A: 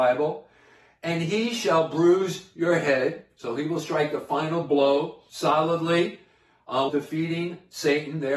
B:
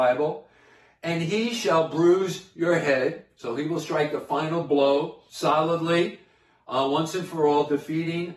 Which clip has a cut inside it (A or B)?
A